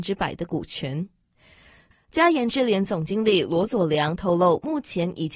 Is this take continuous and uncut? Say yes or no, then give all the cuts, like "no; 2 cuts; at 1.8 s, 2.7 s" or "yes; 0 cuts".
no; 1 cut; at 1.9 s